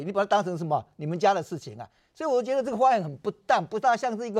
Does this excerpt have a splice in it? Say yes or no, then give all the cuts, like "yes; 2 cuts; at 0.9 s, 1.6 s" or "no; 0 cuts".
no; 0 cuts